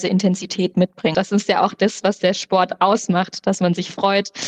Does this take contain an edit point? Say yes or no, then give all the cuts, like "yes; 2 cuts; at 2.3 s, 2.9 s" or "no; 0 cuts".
yes; 1 cut; at 1.1 s